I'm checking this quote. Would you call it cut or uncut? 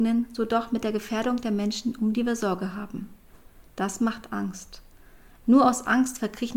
cut